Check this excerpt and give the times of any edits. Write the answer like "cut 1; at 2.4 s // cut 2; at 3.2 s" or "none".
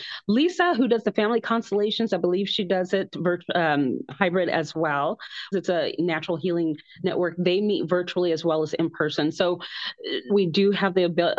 cut 1; at 5.5 s // cut 2; at 10.3 s